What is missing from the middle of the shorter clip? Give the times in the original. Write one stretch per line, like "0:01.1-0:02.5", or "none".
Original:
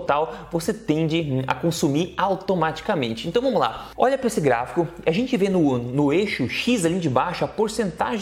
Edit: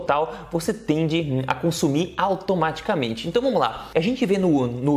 0:03.9-0:05.0